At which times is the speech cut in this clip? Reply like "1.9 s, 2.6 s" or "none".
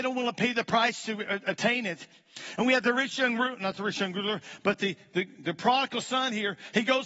none